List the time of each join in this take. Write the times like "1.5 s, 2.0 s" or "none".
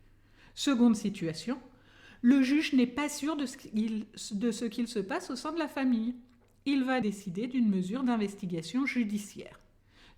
7.0 s